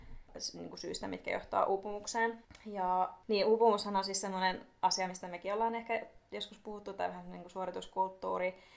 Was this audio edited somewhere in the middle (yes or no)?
no